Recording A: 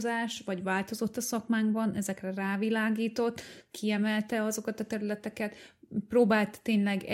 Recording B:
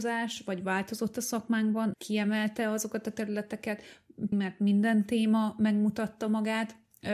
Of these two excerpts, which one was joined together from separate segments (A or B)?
B